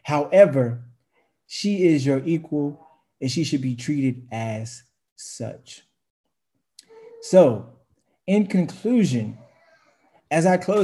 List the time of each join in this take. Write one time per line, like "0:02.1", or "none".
none